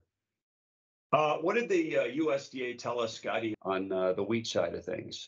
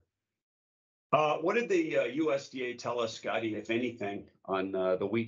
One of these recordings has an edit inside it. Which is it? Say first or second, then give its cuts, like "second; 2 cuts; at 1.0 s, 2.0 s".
first; 1 cut; at 3.5 s